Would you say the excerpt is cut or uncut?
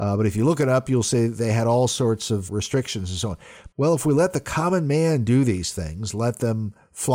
cut